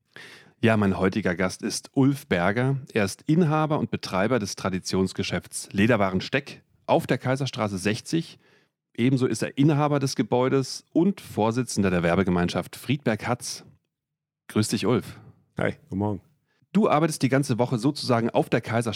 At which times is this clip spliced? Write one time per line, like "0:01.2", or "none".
none